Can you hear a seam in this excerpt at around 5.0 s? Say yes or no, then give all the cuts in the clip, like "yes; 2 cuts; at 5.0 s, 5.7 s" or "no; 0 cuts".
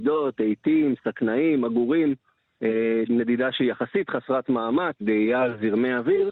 yes; 2 cuts; at 3.1 s, 5.0 s